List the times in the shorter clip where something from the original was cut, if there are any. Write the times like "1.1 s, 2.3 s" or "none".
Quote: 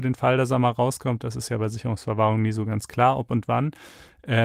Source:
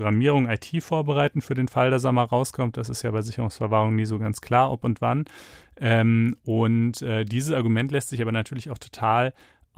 none